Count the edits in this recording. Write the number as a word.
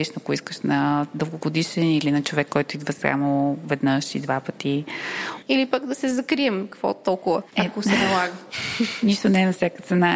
one